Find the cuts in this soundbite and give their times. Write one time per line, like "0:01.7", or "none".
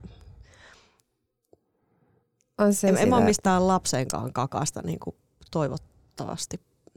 none